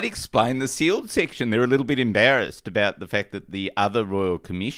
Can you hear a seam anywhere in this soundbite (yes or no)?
no